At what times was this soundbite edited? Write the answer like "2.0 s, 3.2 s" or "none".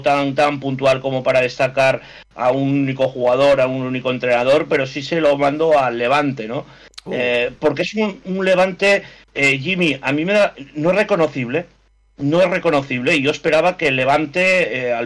none

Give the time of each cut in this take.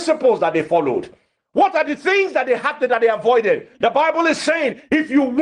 1.4 s, 3.7 s

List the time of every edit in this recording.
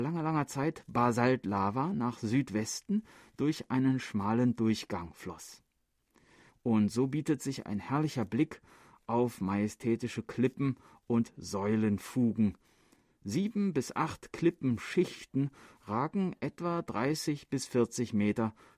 6.5 s

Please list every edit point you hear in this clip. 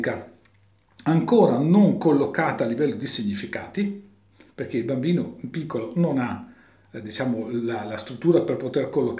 none

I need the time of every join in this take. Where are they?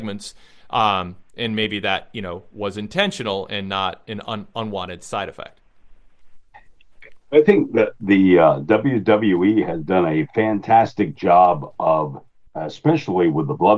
12.5 s

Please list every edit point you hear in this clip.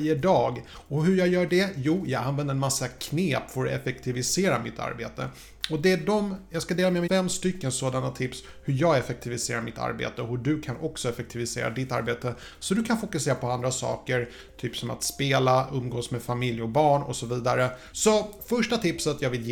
7.1 s, 17.9 s

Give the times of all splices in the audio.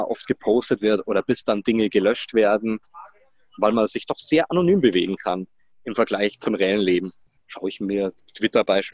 7.4 s

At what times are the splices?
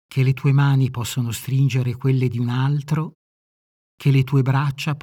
none

